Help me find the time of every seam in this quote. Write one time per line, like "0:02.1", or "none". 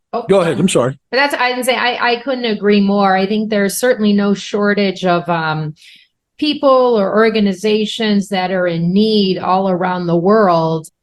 none